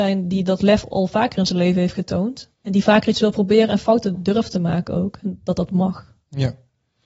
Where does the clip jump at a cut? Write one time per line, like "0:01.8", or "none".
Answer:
0:02.5